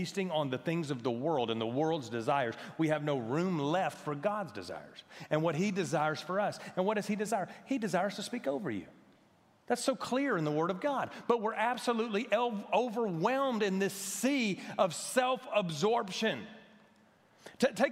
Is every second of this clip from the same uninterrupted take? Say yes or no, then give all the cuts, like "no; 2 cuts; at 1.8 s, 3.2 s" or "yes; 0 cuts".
yes; 0 cuts